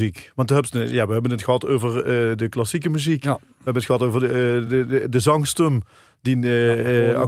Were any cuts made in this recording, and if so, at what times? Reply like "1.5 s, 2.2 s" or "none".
none